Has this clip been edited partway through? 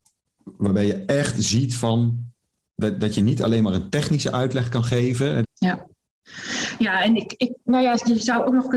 yes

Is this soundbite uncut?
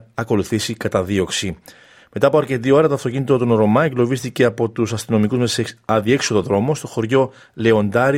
yes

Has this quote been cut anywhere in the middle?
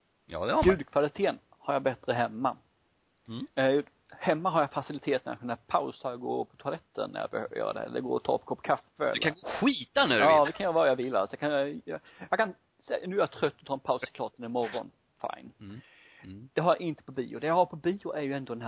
no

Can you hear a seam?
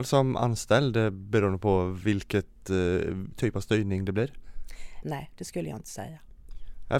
yes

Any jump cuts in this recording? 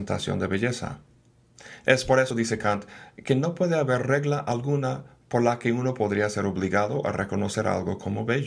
no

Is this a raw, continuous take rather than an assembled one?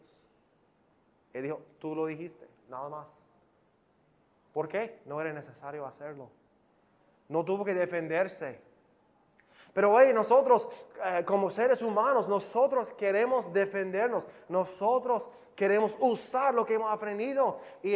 no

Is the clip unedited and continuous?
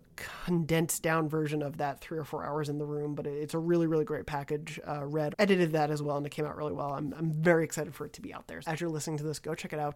no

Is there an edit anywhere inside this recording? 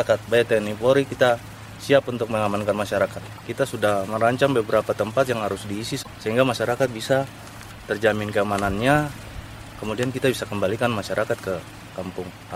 no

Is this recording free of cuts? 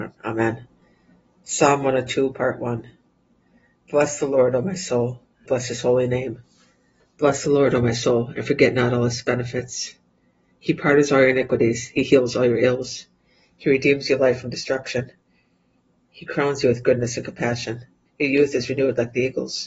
no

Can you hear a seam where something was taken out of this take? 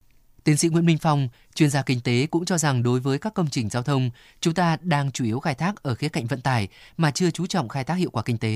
no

